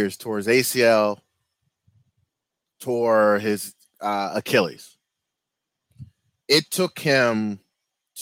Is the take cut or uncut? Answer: uncut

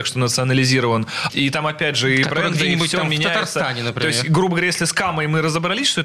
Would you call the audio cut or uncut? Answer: cut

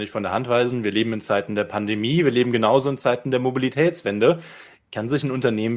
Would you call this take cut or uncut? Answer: uncut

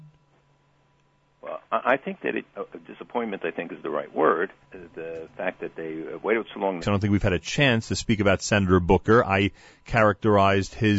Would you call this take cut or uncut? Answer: cut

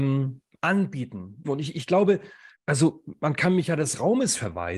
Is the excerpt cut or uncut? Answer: cut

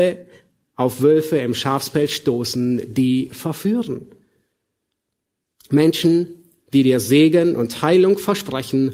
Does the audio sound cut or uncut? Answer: uncut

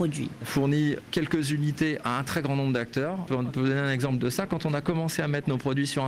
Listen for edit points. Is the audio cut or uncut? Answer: cut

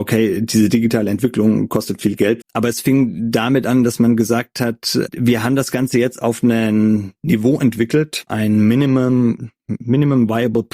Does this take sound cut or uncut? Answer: cut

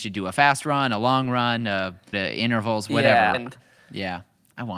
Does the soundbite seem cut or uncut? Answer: cut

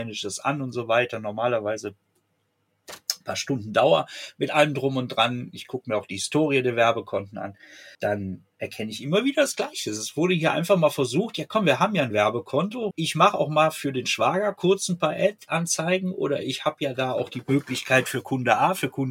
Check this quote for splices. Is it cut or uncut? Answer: cut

